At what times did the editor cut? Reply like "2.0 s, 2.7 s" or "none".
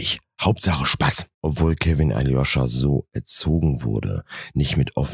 1.3 s